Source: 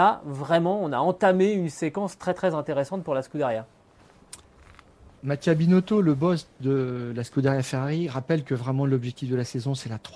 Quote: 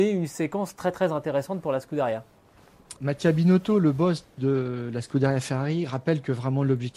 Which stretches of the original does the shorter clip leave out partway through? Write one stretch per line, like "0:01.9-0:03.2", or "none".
0:04.4-0:05.2